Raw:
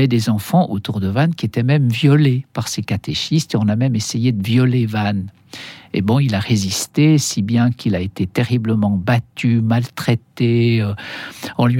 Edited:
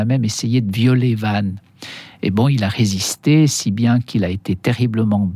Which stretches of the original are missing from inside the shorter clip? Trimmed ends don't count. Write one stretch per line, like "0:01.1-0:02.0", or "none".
none